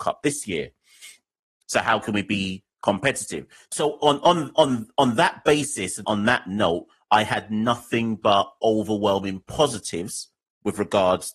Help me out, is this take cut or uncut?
cut